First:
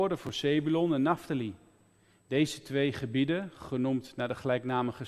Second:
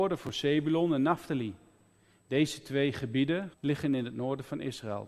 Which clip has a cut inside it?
second; 1 cut; at 3.5 s

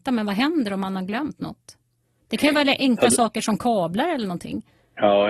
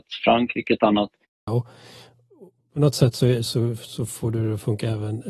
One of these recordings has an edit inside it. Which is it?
second; 1 cut; at 1.5 s

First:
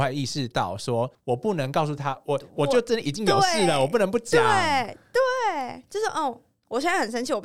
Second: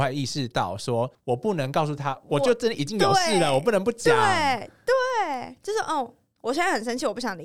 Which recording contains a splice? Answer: second; 1 cut; at 2.2 s

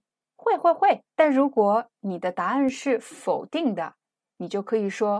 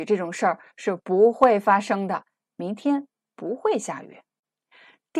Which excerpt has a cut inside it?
first; 1 cut; at 1.1 s

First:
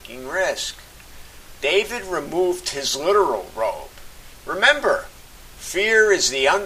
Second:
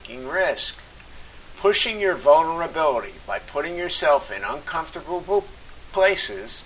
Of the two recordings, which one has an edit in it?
first; 2 cuts; at 1.5 s, 4.4 s

